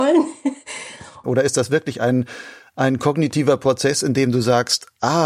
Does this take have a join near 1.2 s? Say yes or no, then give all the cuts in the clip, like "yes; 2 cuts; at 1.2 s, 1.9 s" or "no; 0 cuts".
yes; 1 cut; at 1.2 s